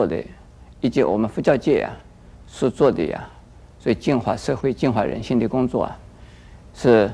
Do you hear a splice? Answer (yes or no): no